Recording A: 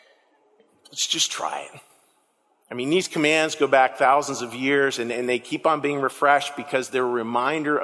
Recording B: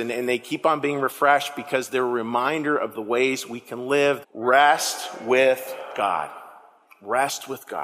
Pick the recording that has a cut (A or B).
B